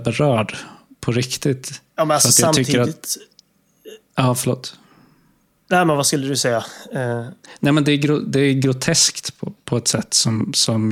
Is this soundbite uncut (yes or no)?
yes